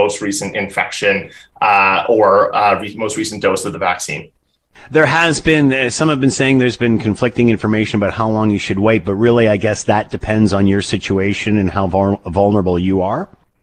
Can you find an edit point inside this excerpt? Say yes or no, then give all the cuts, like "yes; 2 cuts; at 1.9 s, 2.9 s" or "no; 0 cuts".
no; 0 cuts